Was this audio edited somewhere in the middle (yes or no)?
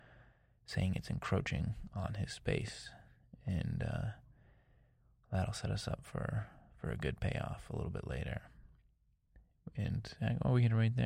no